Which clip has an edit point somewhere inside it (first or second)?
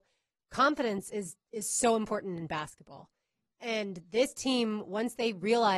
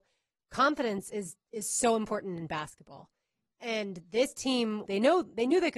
second